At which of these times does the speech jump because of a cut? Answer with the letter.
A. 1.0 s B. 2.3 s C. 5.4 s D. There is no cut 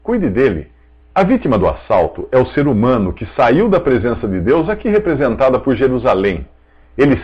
A